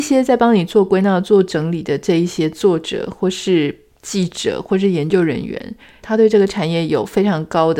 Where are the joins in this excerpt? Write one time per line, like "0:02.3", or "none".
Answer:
0:06.0

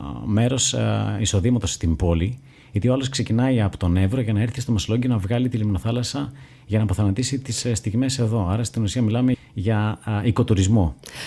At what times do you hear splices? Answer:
0:09.3

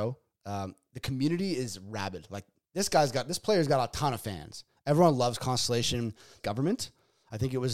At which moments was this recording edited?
0:06.4

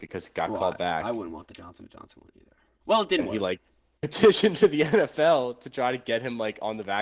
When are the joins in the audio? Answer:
0:02.8

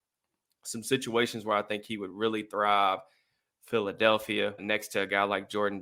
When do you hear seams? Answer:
0:04.6

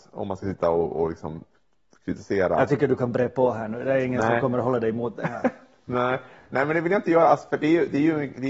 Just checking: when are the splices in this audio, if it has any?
none

